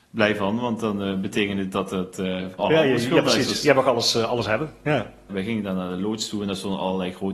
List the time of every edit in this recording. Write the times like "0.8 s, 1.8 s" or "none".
2.6 s, 5.3 s